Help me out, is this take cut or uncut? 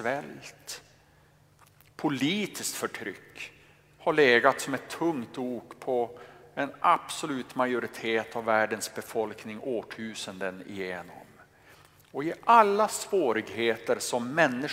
uncut